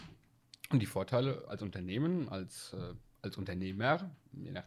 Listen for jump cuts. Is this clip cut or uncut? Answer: cut